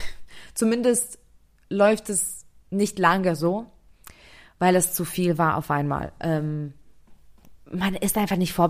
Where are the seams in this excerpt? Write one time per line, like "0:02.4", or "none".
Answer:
0:07.6